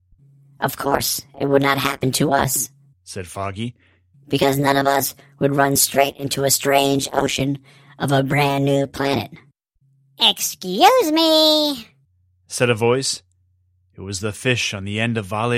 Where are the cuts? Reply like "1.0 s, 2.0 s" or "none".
none